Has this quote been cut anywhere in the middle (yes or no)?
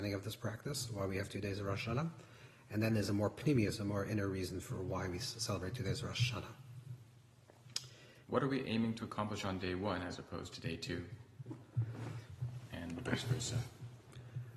yes